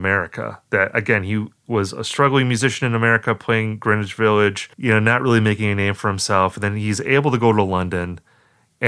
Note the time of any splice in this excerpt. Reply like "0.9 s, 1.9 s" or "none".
none

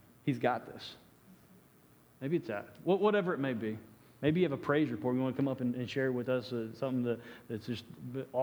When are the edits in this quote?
none

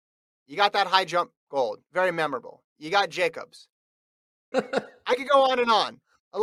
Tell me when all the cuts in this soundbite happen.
4.5 s

